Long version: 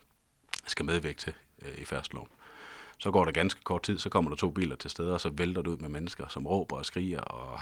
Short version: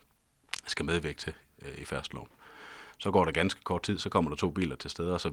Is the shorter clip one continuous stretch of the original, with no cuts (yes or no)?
yes